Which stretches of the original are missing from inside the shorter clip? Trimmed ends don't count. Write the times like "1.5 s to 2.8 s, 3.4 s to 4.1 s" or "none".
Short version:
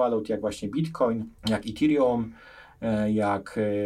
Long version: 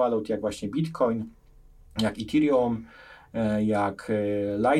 1.4 s to 1.9 s